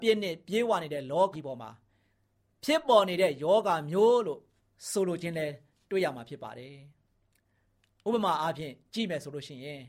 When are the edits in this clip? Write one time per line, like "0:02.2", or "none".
0:01.3

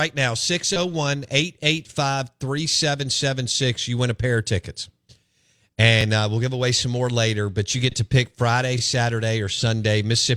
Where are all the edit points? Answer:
none

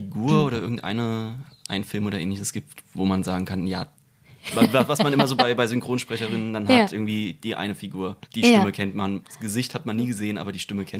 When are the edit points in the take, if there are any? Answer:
0:08.2

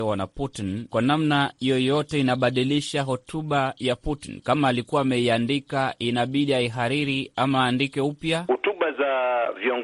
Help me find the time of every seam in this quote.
none

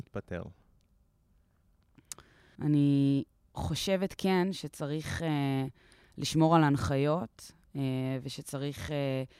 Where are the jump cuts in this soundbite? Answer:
0:02.5

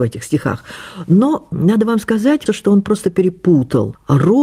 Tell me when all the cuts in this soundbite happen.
0:02.5

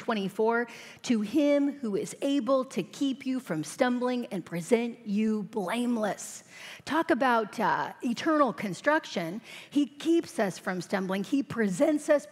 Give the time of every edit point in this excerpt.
none

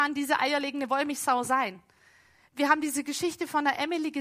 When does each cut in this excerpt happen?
none

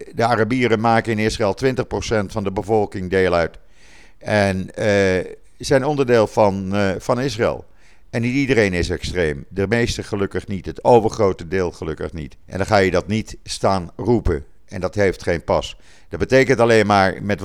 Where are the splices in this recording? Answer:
0:12.4

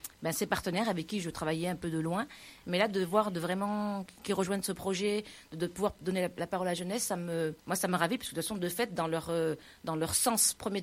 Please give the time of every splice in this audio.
0:07.6

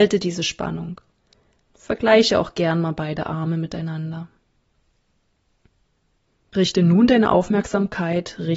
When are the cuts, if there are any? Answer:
0:01.6

